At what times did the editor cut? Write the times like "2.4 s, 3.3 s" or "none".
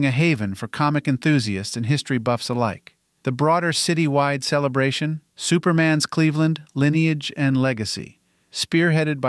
3.2 s, 5.3 s